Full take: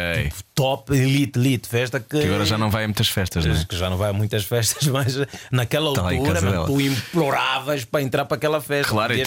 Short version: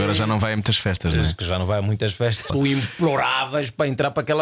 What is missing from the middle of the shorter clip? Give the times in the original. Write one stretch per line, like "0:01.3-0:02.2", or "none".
0:04.8-0:06.6